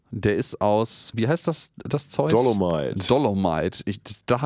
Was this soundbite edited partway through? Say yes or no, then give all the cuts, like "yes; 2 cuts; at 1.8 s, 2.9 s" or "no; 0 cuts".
no; 0 cuts